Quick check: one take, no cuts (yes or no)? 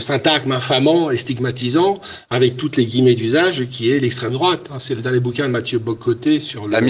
yes